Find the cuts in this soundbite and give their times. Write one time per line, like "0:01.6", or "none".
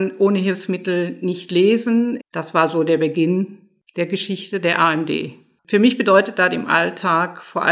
0:02.2
0:05.6